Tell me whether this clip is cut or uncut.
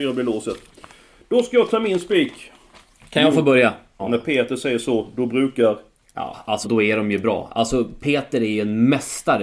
cut